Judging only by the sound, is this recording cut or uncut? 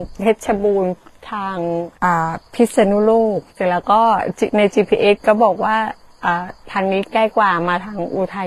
cut